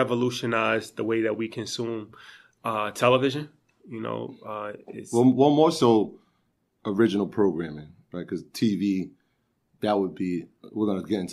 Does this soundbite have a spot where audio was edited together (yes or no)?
no